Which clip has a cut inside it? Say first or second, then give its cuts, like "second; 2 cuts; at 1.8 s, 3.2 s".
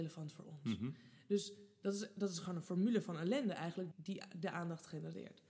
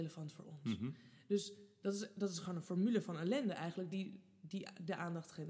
first; 1 cut; at 3.9 s